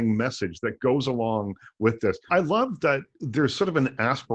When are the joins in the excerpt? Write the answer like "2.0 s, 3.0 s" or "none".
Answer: 2.3 s